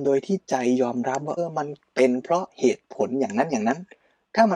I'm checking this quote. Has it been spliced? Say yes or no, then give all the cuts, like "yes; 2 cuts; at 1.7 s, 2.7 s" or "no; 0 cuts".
yes; 1 cut; at 1.4 s